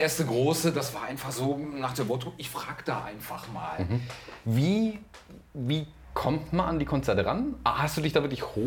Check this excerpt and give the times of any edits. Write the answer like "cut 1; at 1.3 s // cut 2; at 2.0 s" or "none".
cut 1; at 4.4 s